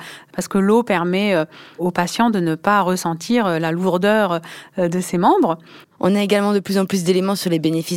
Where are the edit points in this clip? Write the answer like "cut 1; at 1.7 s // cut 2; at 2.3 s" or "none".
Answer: cut 1; at 5.8 s